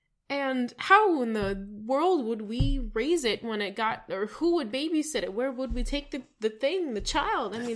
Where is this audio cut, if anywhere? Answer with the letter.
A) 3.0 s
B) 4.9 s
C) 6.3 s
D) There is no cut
D